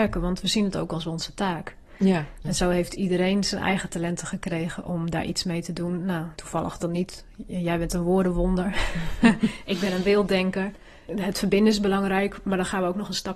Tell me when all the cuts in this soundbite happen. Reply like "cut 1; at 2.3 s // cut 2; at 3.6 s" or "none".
cut 1; at 2.4 s // cut 2; at 6.4 s // cut 3; at 11.1 s

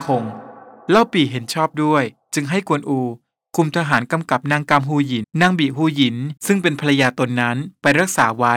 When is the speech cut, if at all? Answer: cut 1; at 5.2 s // cut 2; at 6.4 s

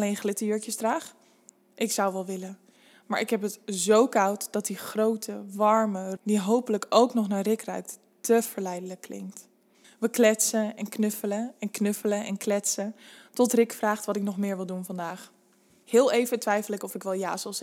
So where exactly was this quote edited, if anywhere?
cut 1; at 6.2 s // cut 2; at 9.8 s // cut 3; at 15.8 s

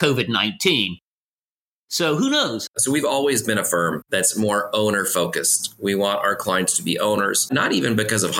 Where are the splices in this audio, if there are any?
cut 1; at 2.7 s

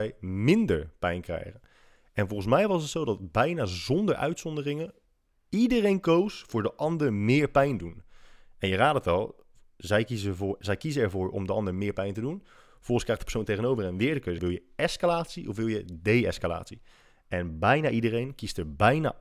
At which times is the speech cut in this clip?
cut 1; at 14.4 s

